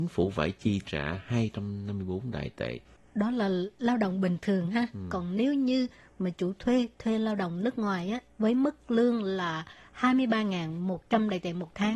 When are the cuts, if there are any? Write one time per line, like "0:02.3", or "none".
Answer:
none

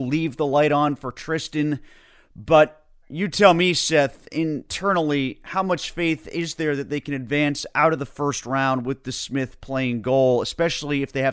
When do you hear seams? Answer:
none

